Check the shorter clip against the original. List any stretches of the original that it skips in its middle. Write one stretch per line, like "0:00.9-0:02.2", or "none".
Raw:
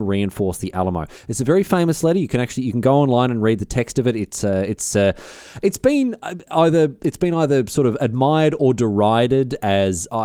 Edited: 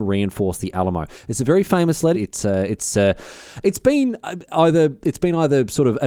0:02.1-0:04.1